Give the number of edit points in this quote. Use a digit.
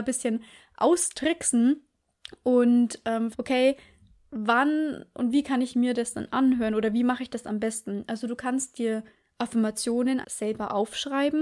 2